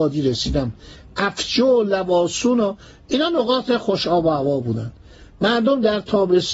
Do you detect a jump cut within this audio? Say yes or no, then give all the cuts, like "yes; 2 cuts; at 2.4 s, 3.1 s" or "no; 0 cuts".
no; 0 cuts